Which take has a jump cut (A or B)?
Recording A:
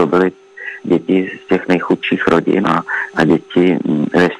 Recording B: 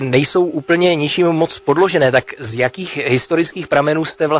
A